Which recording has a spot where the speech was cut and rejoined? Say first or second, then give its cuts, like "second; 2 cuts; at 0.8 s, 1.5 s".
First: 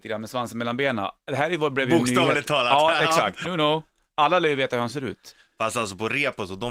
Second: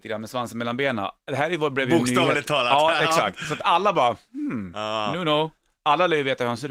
first; 1 cut; at 3.4 s